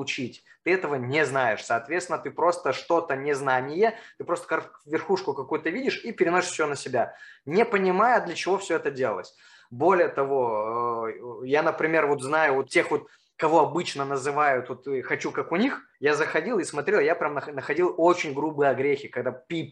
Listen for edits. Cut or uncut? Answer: cut